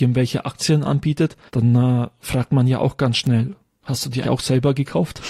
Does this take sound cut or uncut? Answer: cut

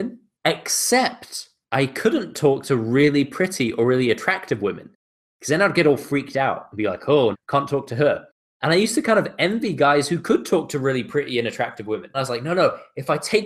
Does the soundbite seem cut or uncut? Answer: cut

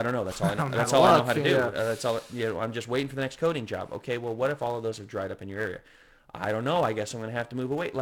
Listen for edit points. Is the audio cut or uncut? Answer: uncut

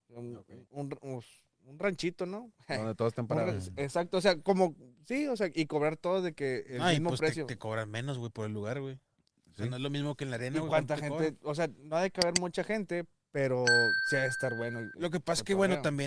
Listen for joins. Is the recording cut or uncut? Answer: uncut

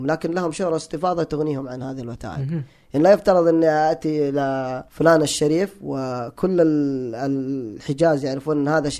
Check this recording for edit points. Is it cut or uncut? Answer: cut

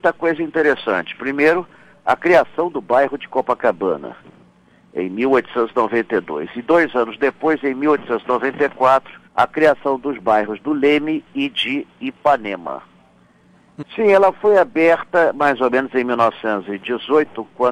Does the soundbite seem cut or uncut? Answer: cut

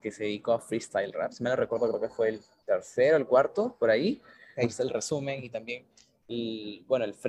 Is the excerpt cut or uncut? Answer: cut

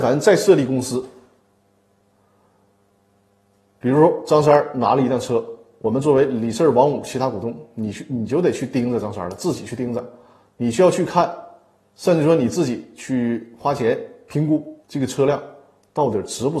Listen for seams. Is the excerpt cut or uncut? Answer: cut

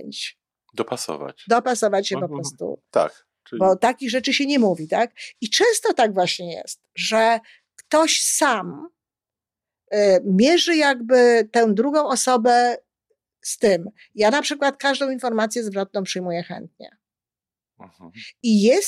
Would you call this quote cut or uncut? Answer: uncut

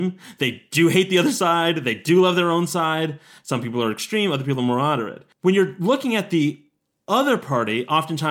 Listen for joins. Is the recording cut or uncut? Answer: cut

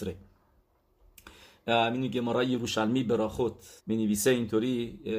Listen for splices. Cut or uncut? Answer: cut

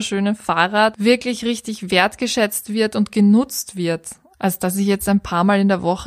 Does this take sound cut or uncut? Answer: uncut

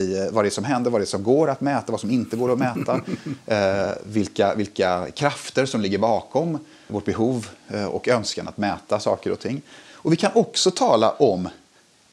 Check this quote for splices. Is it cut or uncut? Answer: cut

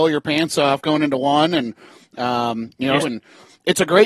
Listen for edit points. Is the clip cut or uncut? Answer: cut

